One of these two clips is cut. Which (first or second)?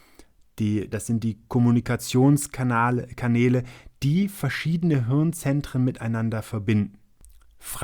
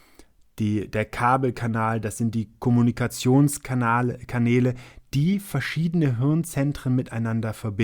first